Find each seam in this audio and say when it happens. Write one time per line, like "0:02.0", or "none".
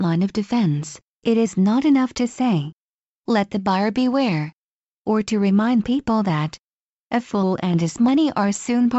0:01.1